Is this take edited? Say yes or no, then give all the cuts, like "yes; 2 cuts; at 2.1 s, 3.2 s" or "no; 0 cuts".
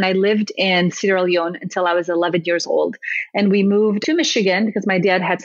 no; 0 cuts